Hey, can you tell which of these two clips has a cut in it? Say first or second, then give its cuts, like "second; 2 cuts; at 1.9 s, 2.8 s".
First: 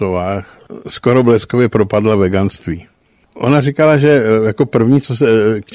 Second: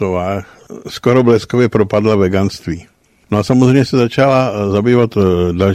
first; 1 cut; at 3.3 s